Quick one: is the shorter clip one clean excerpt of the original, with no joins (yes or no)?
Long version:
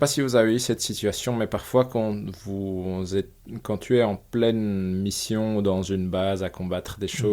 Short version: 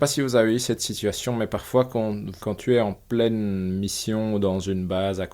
no